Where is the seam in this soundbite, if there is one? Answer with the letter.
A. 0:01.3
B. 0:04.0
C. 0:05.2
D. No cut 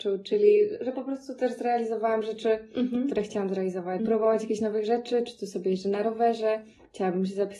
B